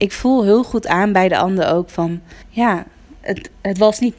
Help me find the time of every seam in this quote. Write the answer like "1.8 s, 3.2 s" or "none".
2.4 s